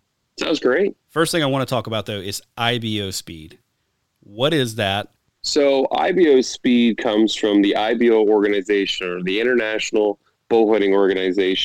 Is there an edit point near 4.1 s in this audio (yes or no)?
no